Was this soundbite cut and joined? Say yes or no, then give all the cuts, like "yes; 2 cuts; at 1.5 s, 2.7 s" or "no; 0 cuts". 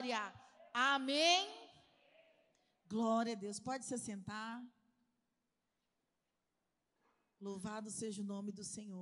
no; 0 cuts